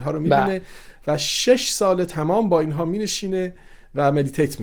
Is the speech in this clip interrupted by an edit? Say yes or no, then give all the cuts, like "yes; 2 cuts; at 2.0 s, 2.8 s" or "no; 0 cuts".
no; 0 cuts